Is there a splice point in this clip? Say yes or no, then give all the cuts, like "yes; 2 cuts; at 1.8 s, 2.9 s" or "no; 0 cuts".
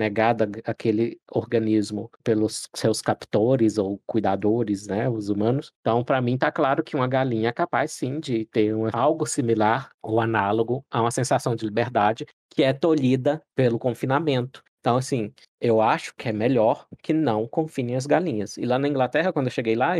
no; 0 cuts